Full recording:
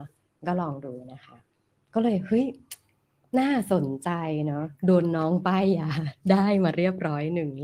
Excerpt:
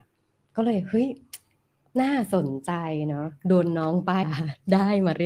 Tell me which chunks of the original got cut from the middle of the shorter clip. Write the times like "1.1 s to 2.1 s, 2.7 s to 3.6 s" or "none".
5.6 s to 5.8 s